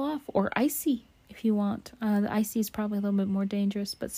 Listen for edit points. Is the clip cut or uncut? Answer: uncut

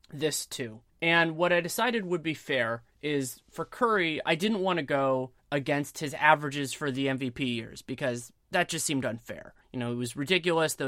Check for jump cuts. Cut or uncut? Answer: uncut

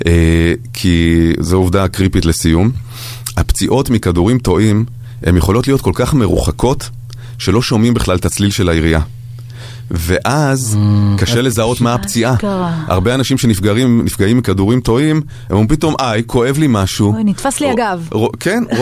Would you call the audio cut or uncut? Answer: uncut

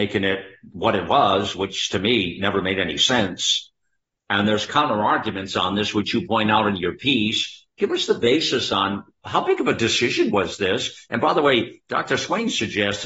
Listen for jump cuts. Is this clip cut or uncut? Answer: uncut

